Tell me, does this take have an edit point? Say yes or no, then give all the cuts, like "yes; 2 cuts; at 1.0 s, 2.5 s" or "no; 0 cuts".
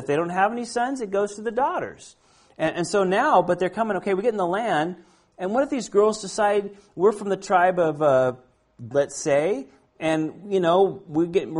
yes; 1 cut; at 8.9 s